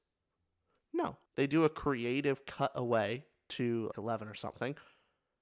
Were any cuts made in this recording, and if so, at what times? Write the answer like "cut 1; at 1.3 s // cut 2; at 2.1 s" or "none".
cut 1; at 1.3 s // cut 2; at 3.9 s

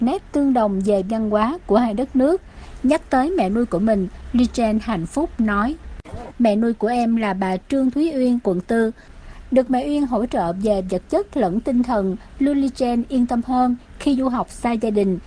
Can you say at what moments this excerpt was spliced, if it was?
cut 1; at 6.3 s // cut 2; at 8.4 s

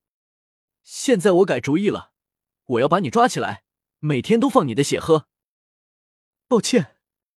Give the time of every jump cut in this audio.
none

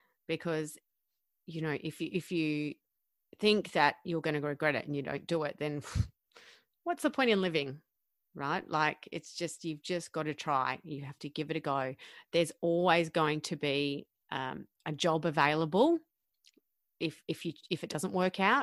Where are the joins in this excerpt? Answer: none

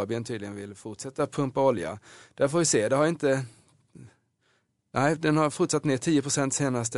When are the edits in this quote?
none

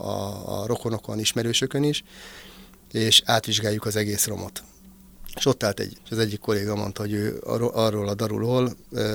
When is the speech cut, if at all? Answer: cut 1; at 5.9 s

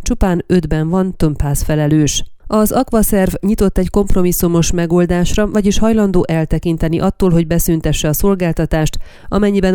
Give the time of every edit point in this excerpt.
none

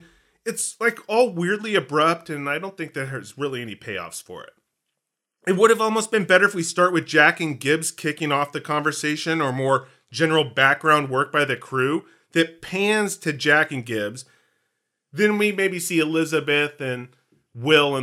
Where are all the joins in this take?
none

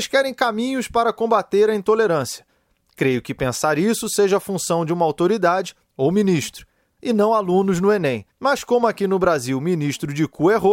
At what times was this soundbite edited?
cut 1; at 8.3 s

